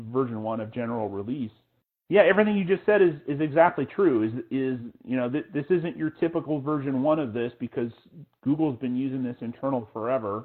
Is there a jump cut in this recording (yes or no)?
no